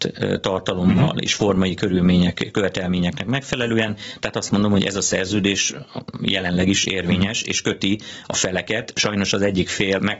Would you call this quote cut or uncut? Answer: uncut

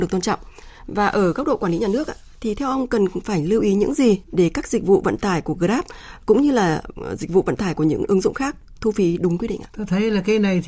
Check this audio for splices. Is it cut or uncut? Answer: cut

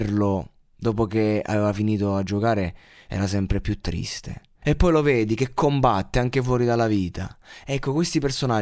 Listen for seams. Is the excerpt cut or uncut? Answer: cut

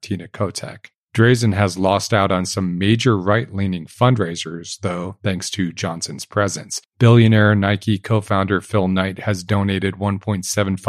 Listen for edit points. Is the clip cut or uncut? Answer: cut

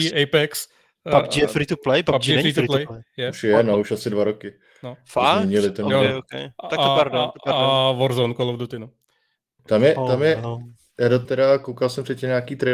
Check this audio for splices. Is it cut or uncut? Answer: cut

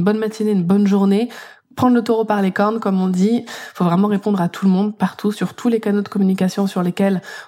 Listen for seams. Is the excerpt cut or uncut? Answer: cut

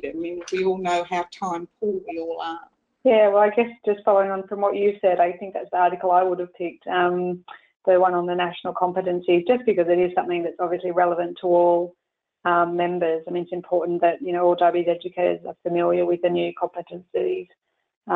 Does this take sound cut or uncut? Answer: uncut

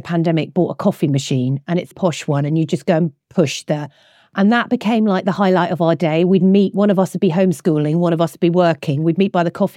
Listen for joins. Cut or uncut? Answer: cut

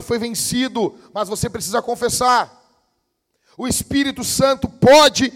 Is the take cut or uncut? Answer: uncut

